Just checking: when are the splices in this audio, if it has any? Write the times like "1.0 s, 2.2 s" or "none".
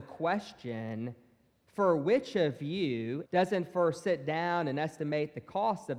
3.3 s